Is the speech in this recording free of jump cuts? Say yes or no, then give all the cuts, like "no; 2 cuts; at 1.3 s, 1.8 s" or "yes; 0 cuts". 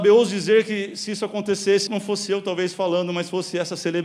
no; 1 cut; at 1.9 s